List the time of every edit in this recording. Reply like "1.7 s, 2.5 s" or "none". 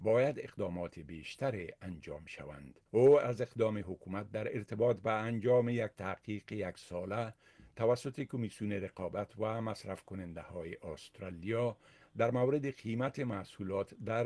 2.9 s